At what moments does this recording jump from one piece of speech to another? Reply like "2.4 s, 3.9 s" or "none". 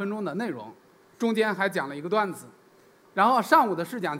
3.0 s